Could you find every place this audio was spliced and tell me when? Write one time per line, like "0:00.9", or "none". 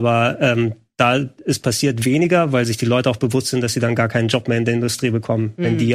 none